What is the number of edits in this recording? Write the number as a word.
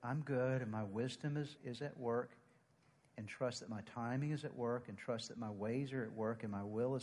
one